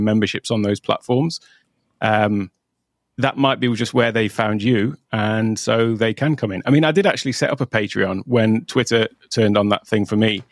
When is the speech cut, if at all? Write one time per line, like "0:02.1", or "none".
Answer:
none